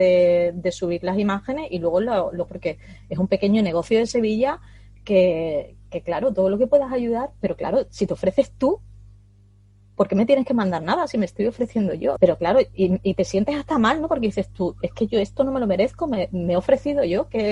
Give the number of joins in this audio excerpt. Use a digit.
2